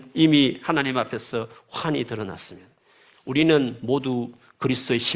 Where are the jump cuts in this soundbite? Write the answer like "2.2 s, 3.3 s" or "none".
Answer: 3.1 s